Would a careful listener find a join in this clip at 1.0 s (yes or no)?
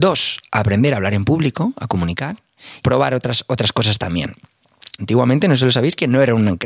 no